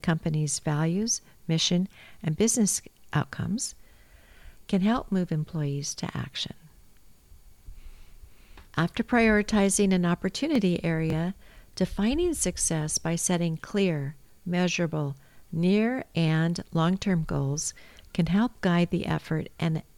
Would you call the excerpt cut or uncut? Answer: cut